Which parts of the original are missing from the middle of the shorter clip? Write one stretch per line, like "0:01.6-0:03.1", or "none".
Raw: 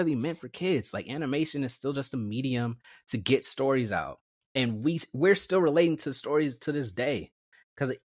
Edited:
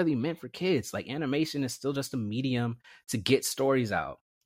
none